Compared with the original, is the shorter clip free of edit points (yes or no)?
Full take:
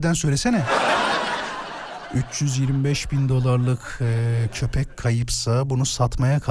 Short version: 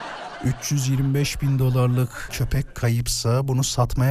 no